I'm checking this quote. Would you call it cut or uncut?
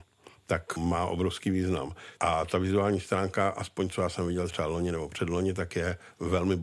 cut